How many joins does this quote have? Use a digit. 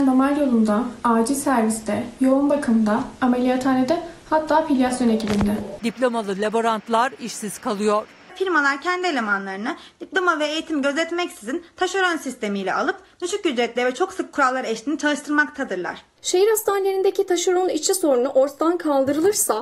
2